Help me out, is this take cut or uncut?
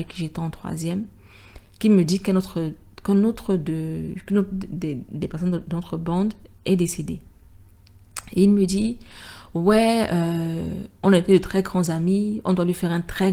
uncut